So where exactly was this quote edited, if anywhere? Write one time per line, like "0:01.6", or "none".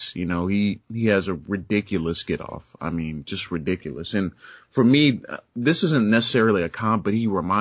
none

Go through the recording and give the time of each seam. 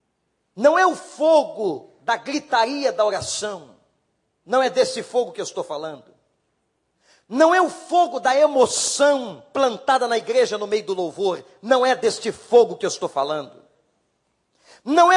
none

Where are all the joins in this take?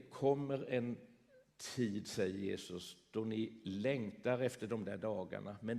none

